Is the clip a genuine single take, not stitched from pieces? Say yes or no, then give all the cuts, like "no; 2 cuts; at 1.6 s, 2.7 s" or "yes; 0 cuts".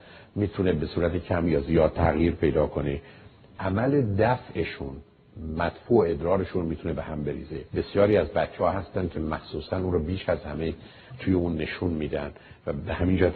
no; 1 cut; at 7.7 s